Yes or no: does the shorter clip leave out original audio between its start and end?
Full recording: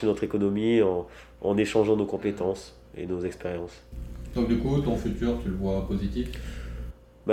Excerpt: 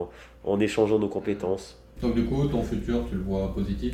yes